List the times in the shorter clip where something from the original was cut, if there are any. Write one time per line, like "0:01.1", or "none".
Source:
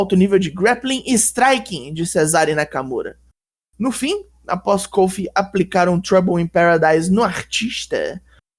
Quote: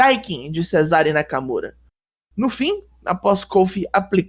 none